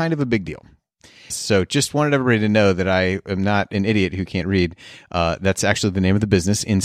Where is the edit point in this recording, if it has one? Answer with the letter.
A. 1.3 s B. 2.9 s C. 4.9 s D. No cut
A